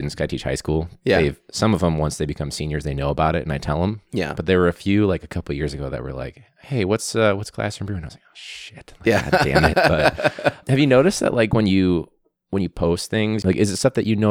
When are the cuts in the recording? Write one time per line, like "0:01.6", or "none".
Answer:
none